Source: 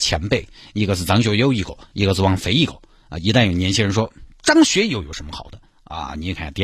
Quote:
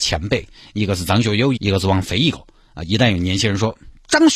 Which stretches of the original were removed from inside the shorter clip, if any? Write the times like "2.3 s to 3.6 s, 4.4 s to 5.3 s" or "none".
1.6 s to 1.9 s